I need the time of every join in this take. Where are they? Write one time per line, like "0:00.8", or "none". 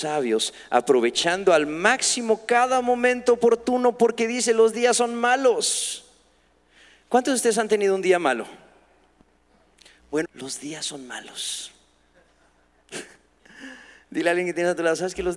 0:10.2